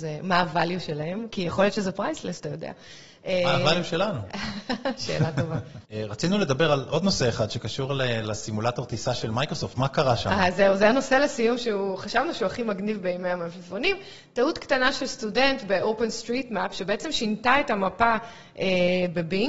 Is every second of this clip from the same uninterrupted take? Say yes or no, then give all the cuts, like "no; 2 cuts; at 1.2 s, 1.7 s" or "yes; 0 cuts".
no; 1 cut; at 9.7 s